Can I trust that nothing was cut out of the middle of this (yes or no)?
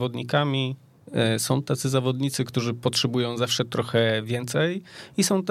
yes